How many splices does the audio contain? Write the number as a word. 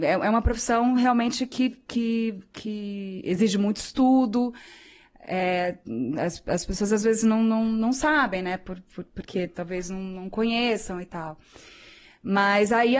zero